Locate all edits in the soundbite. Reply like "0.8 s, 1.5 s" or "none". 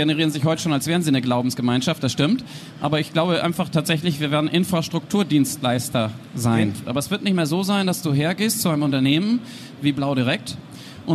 6.8 s